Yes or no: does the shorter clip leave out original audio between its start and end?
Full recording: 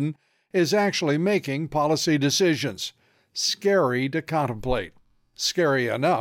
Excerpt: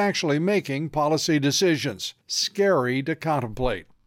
yes